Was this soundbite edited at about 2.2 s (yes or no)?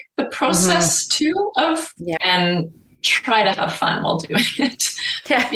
yes